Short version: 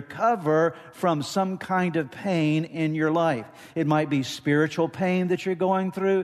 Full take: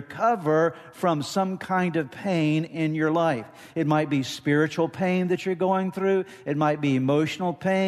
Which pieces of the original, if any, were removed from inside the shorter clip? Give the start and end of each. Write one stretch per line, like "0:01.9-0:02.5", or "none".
none